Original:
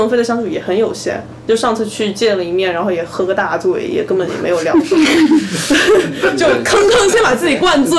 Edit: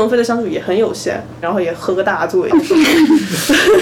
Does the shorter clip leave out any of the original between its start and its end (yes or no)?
yes